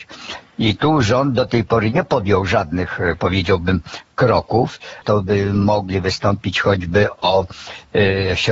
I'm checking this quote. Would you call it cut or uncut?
cut